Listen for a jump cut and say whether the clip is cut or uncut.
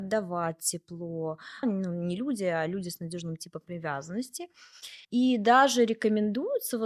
cut